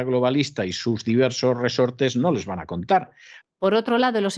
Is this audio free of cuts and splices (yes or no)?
no